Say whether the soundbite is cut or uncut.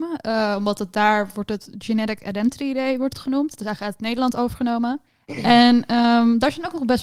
cut